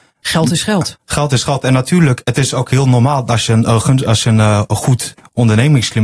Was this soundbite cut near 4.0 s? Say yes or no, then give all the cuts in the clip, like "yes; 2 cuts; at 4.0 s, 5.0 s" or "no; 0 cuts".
no; 0 cuts